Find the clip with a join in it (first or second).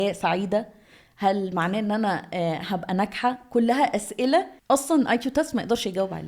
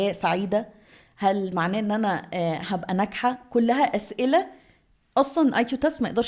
first